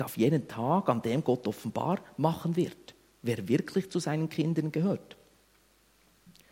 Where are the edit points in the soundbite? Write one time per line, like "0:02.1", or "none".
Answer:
none